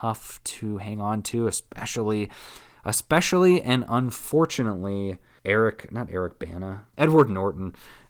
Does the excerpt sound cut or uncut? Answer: cut